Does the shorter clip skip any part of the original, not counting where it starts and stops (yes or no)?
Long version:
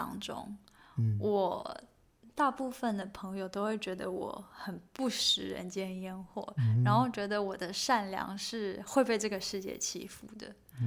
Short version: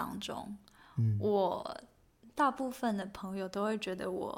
no